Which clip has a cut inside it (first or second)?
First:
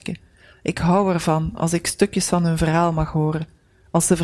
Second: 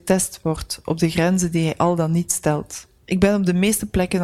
second